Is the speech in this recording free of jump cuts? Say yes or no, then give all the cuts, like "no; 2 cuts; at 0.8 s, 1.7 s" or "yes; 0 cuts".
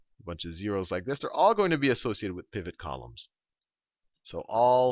yes; 0 cuts